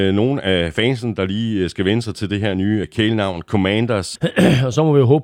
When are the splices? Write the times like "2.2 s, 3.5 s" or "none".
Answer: 2.8 s, 4.2 s